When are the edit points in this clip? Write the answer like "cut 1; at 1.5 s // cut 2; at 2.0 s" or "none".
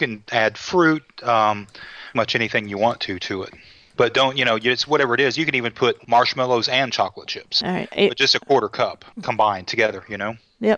cut 1; at 2.1 s